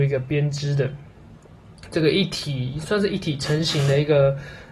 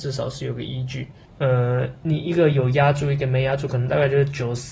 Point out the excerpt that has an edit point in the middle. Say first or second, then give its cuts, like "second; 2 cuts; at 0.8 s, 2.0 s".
second; 1 cut; at 1.3 s